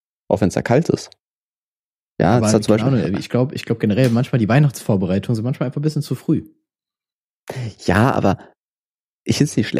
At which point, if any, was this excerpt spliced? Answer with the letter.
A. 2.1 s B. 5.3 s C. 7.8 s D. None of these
A